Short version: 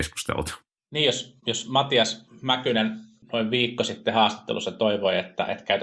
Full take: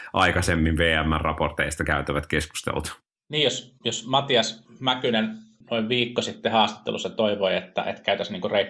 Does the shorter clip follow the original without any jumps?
yes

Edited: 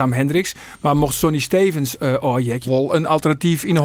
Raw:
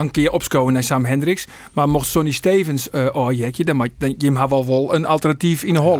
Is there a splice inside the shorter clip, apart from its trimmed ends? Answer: yes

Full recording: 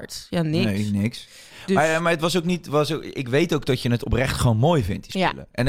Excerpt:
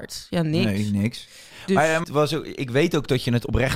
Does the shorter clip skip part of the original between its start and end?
yes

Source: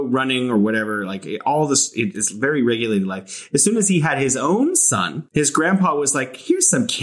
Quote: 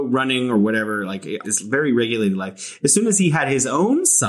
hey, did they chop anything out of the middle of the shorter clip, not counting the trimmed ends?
yes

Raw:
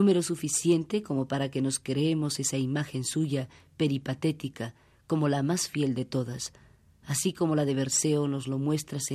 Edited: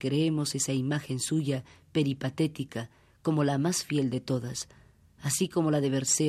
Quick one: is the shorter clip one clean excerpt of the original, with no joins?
yes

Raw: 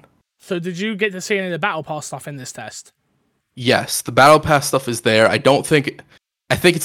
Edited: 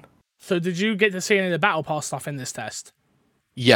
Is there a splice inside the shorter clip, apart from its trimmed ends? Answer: no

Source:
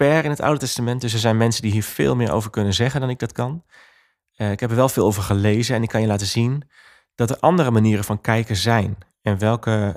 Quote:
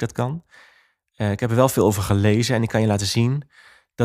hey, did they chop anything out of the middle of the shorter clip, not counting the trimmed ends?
no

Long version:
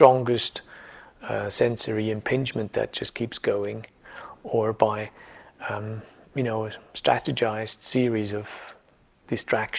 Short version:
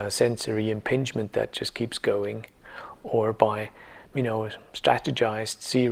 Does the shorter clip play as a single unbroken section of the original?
no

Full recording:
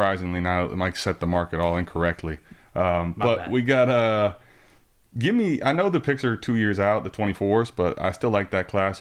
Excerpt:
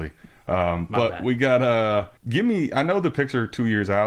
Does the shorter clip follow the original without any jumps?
no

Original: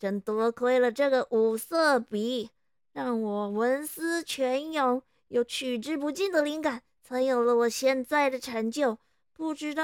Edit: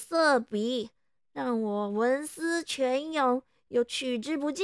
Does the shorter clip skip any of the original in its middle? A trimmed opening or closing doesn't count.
no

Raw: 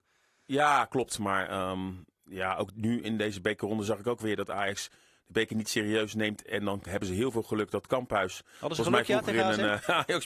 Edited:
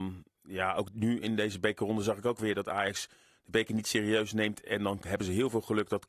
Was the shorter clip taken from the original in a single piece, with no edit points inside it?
yes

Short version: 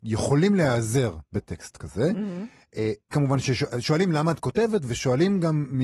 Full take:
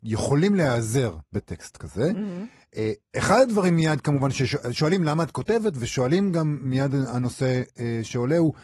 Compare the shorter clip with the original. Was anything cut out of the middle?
yes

